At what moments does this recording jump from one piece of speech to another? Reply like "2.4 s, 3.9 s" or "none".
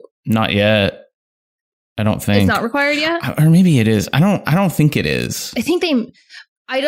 none